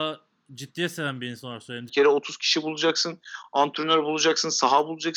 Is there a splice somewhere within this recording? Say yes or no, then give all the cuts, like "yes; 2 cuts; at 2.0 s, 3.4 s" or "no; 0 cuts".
yes; 1 cut; at 1.9 s